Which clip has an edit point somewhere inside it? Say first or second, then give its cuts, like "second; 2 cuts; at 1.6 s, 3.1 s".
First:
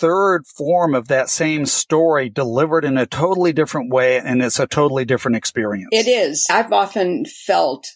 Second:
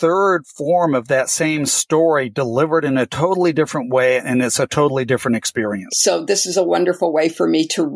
second; 1 cut; at 5.9 s